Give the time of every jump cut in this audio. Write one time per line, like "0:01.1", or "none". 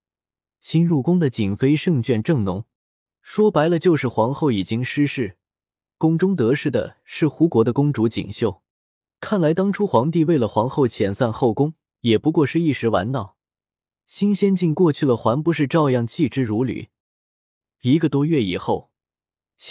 0:17.7